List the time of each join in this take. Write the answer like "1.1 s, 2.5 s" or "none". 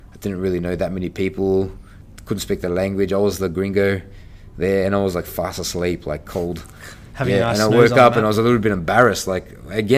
none